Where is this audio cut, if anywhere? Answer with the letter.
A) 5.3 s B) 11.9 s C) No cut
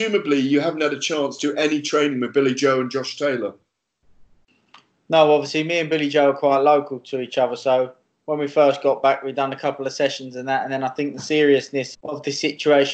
B